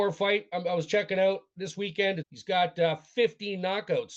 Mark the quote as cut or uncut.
cut